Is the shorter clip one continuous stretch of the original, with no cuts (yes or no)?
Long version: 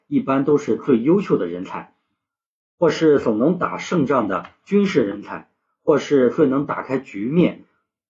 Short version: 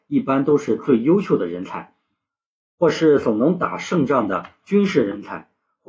yes